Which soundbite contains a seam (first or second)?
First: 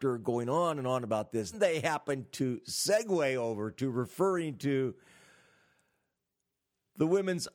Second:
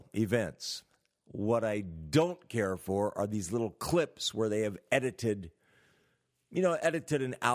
first